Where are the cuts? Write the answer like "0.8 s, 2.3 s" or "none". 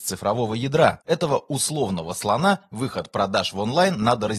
1.0 s